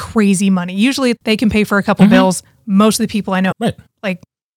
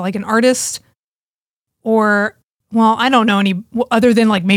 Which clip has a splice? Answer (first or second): first